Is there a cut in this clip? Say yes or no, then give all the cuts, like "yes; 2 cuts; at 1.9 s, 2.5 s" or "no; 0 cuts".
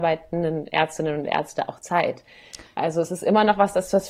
no; 0 cuts